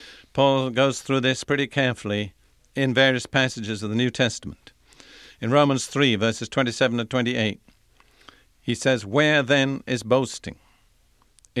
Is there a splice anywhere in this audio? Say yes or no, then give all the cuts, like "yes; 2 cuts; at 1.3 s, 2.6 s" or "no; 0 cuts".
no; 0 cuts